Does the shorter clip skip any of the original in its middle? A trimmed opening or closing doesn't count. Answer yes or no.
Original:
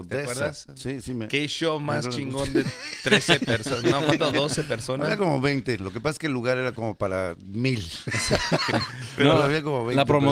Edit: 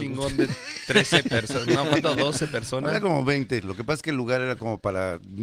no